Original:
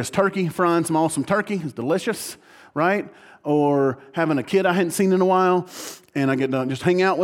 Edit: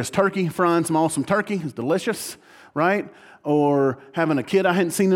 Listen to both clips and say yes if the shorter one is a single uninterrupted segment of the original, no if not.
yes